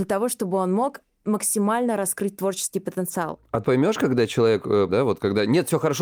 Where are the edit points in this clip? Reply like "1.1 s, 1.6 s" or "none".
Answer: 3.6 s, 4.9 s